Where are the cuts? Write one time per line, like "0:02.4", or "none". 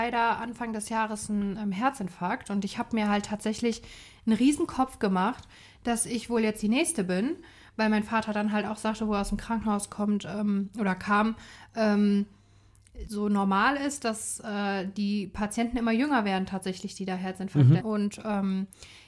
0:13.0
0:17.8